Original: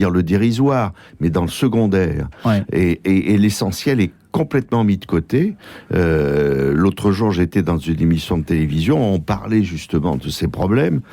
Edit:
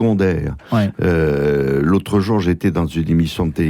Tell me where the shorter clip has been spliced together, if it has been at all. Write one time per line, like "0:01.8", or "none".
0:00.9